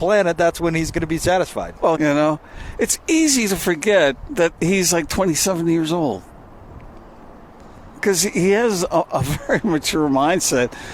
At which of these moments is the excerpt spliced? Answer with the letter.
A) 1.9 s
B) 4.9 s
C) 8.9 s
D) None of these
A